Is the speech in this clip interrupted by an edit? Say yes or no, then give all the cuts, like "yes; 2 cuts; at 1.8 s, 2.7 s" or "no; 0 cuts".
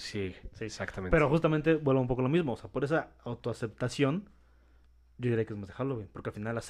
no; 0 cuts